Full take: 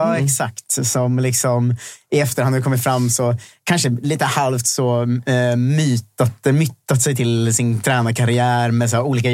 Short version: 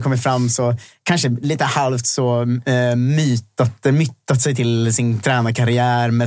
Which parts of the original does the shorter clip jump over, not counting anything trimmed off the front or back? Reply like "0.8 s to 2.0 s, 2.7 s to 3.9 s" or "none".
none